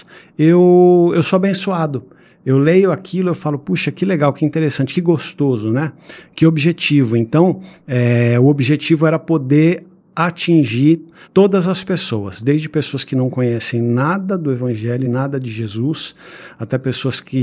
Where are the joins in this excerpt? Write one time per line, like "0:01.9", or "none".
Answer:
none